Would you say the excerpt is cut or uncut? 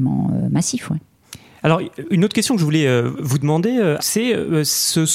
cut